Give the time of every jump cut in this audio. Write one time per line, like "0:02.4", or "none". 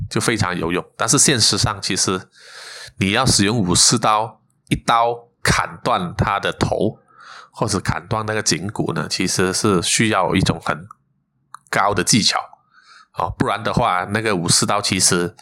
none